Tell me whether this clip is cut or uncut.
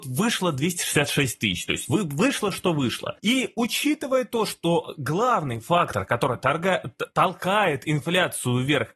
uncut